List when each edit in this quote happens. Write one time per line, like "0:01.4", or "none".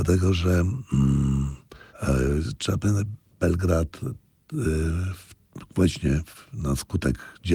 0:01.9